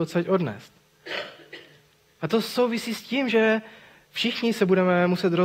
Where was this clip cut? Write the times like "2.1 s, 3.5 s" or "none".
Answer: 2.2 s